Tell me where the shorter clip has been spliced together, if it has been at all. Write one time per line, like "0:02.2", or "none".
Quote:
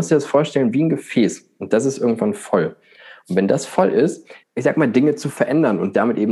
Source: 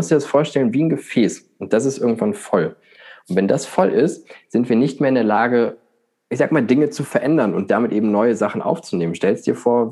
0:04.4